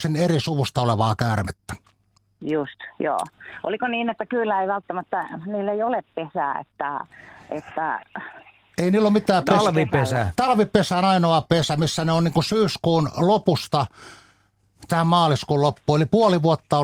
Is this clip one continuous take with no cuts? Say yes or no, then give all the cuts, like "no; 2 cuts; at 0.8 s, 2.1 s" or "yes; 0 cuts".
yes; 0 cuts